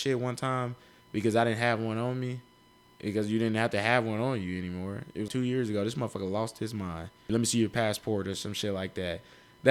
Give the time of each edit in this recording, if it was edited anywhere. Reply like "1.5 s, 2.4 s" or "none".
5.3 s, 7.3 s